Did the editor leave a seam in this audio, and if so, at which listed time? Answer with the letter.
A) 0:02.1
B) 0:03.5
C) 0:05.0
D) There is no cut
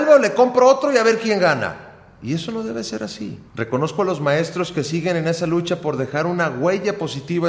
B